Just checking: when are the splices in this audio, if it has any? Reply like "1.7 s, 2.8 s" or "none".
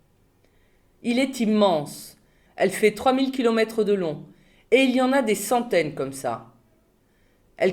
1.0 s, 2.5 s